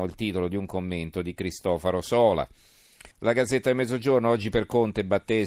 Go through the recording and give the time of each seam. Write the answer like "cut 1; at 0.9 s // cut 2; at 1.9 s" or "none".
cut 1; at 3.1 s